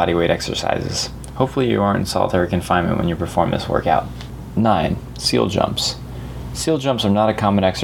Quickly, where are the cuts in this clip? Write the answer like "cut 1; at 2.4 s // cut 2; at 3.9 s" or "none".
none